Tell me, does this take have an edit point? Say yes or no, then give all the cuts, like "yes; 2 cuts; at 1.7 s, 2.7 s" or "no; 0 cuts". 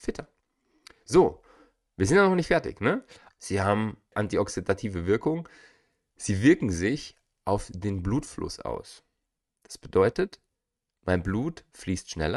yes; 1 cut; at 3.3 s